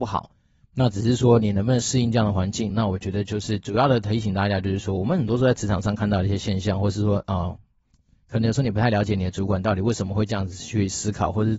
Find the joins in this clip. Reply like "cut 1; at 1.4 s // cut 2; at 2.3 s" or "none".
cut 1; at 2.7 s

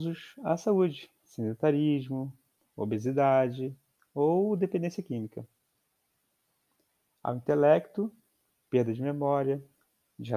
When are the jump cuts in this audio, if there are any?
none

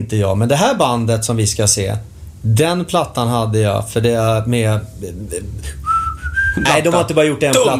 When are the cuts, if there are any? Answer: cut 1; at 6.7 s

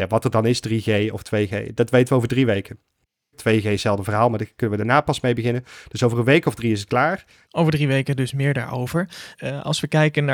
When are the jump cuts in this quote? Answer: cut 1; at 3.3 s // cut 2; at 7.4 s // cut 3; at 9.3 s

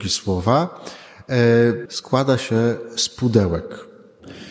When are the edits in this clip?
cut 1; at 1.9 s

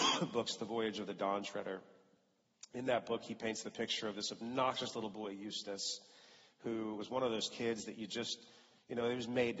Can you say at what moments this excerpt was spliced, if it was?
none

